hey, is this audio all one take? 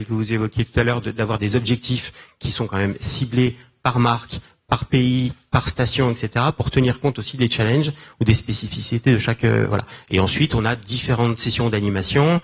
yes; 0 cuts

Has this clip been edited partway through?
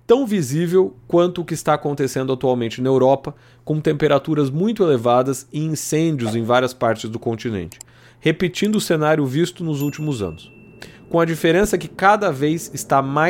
no; 0 cuts

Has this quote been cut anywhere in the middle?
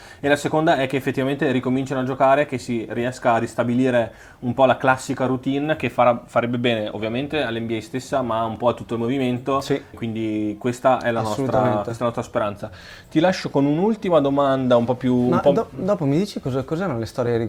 yes; 1 cut; at 9.9 s

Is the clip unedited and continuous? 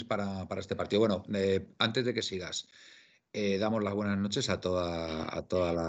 yes; 0 cuts

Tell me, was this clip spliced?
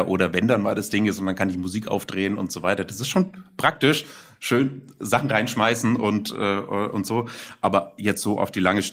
no; 0 cuts

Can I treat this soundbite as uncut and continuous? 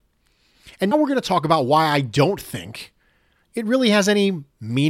no; 1 cut; at 0.9 s

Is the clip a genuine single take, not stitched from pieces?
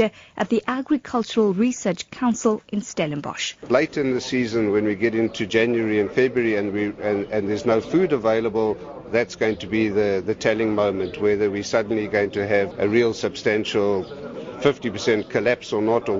no; 1 cut; at 12.7 s

